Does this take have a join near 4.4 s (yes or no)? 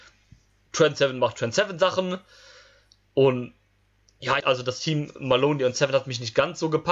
yes